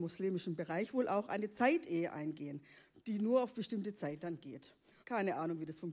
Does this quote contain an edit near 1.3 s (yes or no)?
no